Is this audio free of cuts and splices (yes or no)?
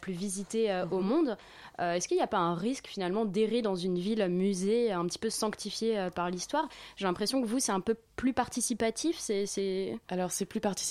yes